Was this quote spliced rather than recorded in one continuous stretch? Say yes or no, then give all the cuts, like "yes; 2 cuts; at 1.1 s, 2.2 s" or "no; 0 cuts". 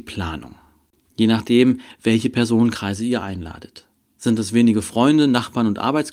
yes; 1 cut; at 1.1 s